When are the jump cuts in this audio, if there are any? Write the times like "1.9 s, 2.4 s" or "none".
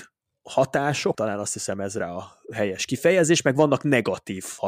1.1 s